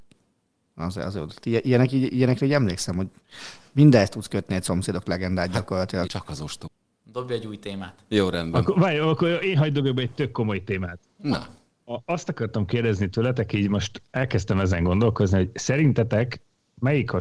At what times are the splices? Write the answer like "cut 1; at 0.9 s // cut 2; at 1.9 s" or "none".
cut 1; at 6.1 s